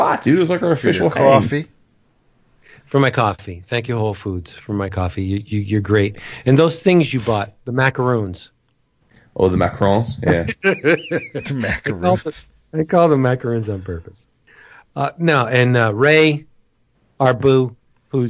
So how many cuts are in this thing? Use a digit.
1